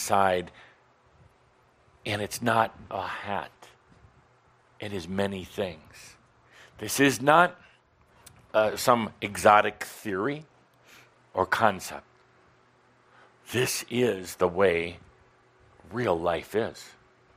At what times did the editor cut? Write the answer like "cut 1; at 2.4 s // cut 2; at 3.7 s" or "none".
cut 1; at 2.9 s